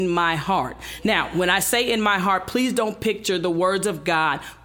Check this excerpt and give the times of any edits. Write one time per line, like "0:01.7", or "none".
none